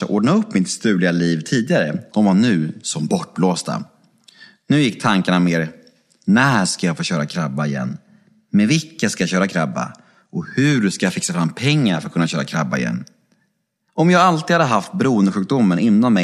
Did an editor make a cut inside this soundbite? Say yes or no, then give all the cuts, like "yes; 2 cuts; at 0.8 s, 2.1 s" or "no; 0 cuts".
yes; 2 cuts; at 2.1 s, 13.9 s